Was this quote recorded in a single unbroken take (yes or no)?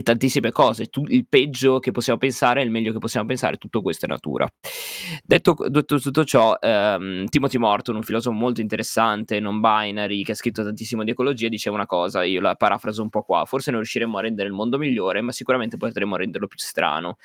yes